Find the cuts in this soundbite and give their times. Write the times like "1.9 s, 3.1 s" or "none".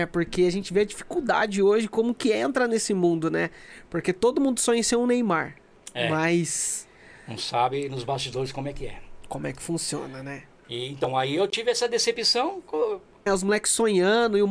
13.3 s